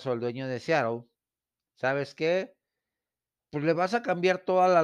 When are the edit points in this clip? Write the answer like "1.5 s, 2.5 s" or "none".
3.4 s